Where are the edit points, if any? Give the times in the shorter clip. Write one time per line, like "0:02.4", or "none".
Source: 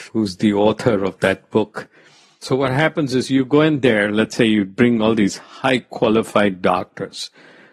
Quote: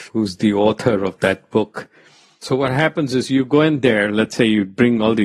none